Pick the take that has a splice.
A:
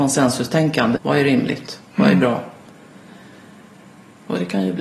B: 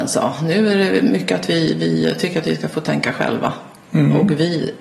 A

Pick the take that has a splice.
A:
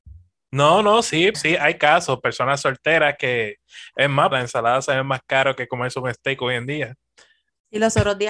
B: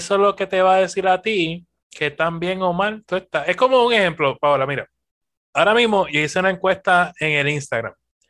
A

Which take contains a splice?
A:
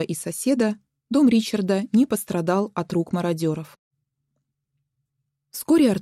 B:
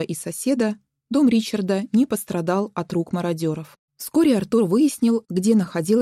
B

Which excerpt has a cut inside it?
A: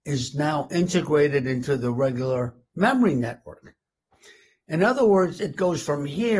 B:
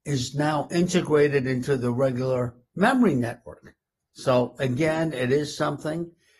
B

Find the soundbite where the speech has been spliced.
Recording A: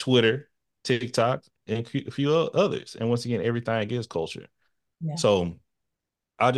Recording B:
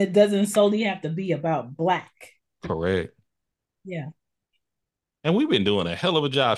B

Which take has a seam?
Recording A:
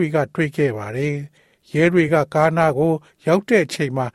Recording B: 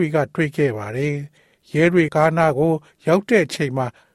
B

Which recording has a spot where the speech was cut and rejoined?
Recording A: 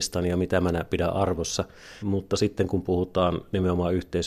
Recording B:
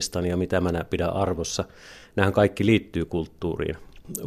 A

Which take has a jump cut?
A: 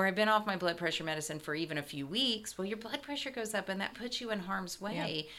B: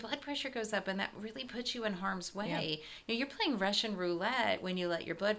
A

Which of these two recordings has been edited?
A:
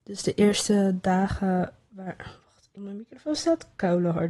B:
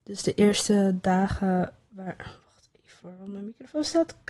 A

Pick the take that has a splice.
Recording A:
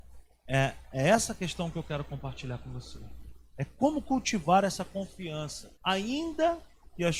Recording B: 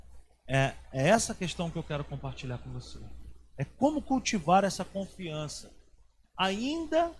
A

